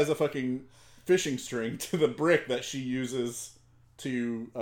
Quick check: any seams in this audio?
no; 0 cuts

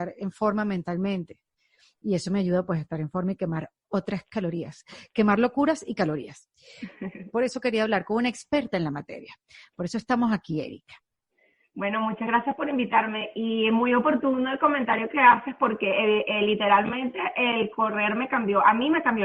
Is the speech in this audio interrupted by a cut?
yes; 1 cut; at 7.3 s

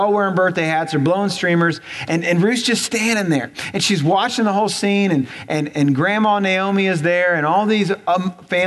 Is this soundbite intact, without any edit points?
yes; 0 cuts

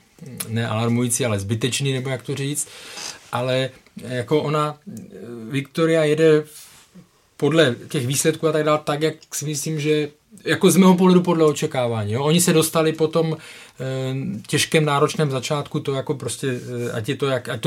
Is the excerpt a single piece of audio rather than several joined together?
yes; 0 cuts

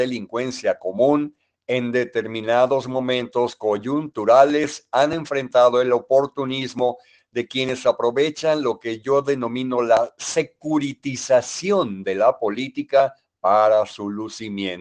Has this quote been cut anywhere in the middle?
no; 0 cuts

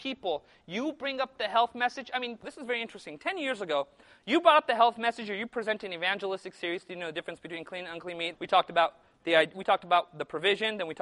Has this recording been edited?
yes; 2 cuts; at 2.4 s, 8.3 s

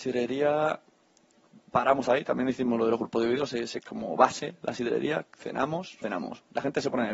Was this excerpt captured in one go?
no; 2 cuts; at 3.8 s, 6.0 s

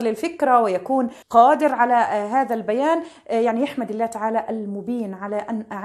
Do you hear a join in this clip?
yes; 1 cut; at 1.2 s

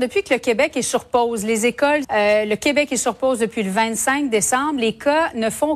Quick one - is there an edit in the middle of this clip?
yes; 1 cut; at 2.0 s

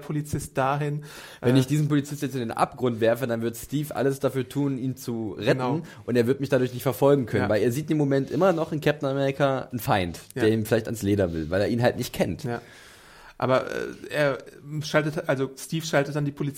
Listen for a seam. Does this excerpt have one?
no; 0 cuts

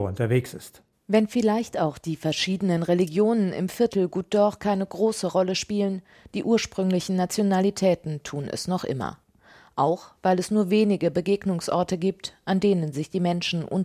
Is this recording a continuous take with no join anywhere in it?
yes; 0 cuts

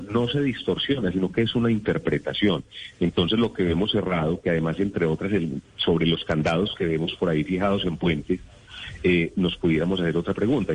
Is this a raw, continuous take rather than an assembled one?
yes; 0 cuts

